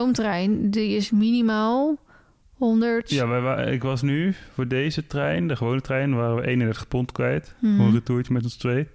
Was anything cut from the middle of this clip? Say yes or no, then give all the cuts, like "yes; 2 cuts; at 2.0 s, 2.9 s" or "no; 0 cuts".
no; 0 cuts